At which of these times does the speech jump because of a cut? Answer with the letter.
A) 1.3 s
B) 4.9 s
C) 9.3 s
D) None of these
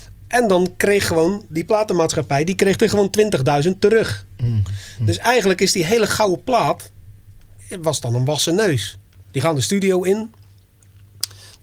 C